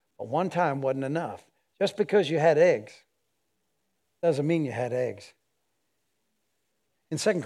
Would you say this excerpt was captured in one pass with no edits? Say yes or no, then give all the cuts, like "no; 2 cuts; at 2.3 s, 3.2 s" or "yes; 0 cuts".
yes; 0 cuts